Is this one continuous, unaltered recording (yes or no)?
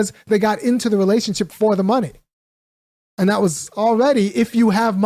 yes